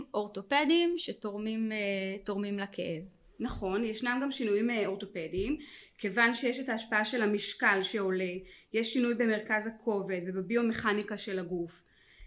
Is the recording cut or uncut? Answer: uncut